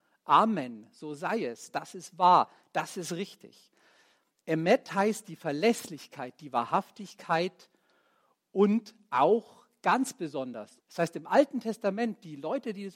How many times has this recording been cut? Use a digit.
1